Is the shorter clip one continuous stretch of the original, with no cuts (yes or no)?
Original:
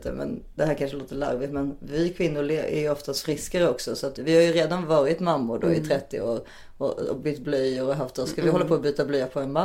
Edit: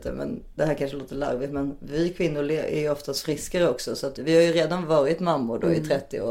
yes